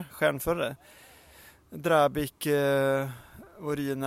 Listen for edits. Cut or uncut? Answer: uncut